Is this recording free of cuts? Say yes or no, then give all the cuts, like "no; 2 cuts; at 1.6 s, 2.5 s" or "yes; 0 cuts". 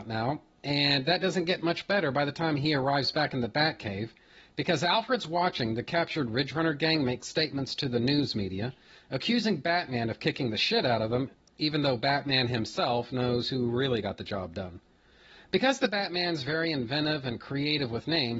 yes; 0 cuts